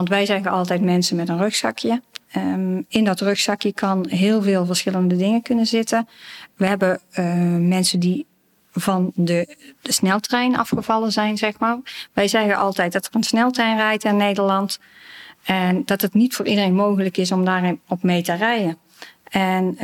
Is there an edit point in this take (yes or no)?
no